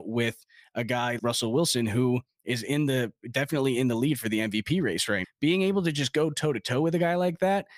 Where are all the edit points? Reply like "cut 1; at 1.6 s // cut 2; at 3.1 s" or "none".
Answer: cut 1; at 1.2 s // cut 2; at 5.2 s